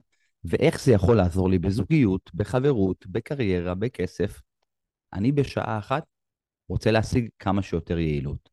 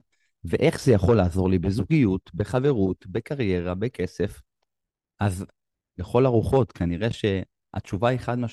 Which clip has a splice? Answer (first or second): first